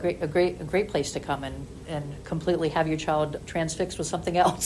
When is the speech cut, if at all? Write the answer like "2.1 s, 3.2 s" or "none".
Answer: 3.4 s